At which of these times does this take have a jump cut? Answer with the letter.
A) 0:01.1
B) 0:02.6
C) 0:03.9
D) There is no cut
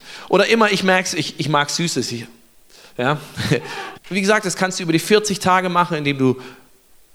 C